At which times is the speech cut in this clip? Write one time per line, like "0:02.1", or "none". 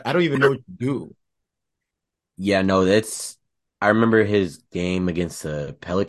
none